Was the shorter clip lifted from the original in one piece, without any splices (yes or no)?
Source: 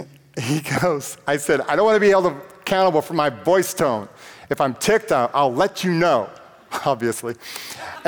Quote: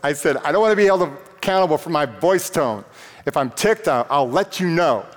yes